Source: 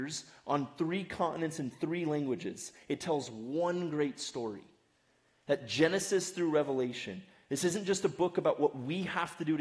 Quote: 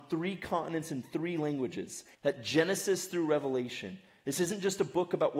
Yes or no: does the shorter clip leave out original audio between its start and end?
yes